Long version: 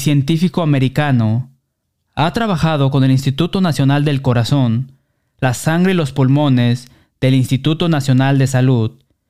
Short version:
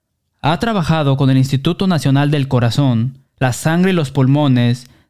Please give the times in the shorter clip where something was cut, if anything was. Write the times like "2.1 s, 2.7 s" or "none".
3.3 s